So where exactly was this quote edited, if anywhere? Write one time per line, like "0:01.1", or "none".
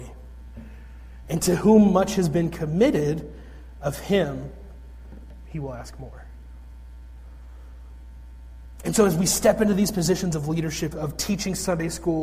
0:01.2
0:10.9